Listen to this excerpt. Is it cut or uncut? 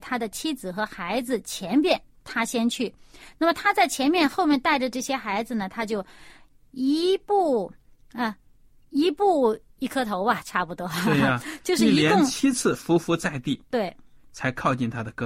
uncut